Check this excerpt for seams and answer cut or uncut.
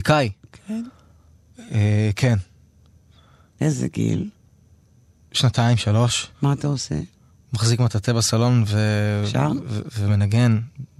cut